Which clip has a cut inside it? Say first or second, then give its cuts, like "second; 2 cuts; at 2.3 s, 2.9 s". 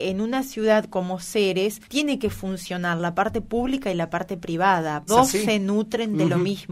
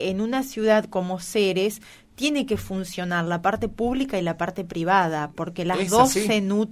first; 2 cuts; at 1.8 s, 5.1 s